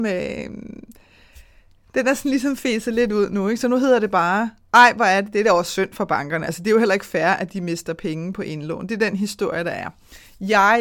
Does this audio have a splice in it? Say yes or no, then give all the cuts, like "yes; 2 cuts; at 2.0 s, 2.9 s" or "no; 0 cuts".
no; 0 cuts